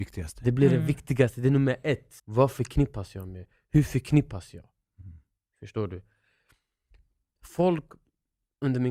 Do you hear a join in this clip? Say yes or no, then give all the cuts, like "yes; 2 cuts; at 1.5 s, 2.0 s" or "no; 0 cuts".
yes; 1 cut; at 2.2 s